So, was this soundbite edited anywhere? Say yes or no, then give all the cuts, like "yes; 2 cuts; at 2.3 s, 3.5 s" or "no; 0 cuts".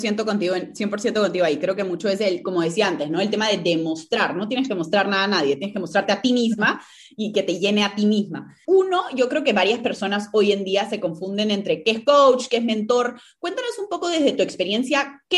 yes; 1 cut; at 8.7 s